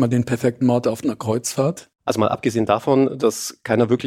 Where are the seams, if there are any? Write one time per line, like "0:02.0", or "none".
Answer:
0:02.0